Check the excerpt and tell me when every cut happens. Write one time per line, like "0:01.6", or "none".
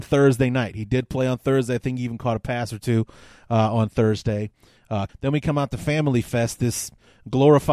0:05.1